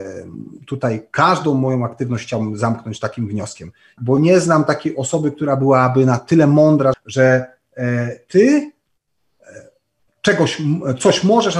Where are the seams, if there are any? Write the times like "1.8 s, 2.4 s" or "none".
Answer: 4.0 s, 6.9 s

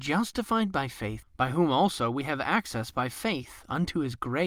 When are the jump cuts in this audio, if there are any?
1.2 s

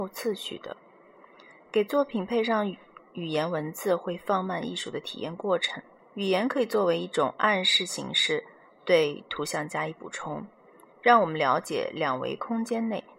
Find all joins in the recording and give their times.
6.0 s

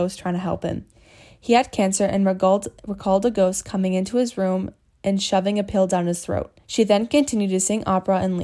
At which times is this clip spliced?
6.6 s

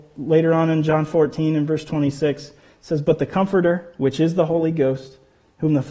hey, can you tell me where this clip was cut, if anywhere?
none

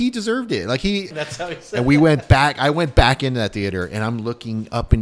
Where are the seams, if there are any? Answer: 1.1 s

